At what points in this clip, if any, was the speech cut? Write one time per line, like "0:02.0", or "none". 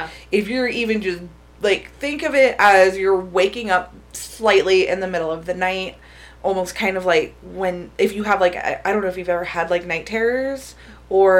none